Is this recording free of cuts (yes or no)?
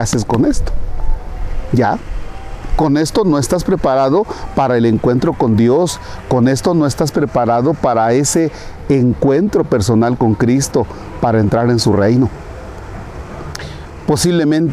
yes